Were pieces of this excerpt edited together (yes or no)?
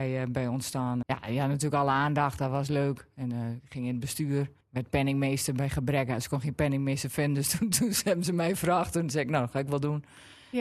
yes